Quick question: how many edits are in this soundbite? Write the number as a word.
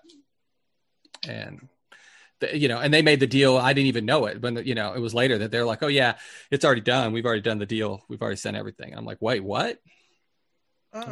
zero